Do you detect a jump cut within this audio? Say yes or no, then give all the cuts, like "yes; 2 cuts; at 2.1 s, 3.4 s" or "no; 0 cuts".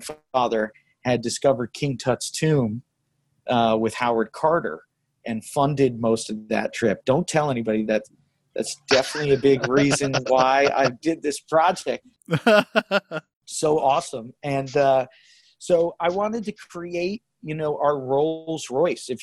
no; 0 cuts